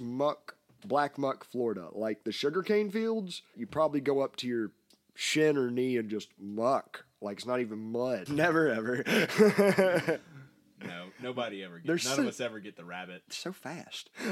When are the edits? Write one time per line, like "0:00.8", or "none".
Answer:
0:03.5
0:08.3